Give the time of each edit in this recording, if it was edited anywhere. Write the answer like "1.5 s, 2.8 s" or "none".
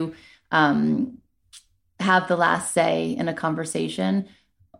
none